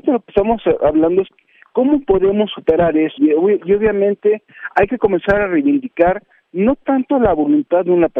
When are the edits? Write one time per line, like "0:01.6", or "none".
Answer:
0:03.2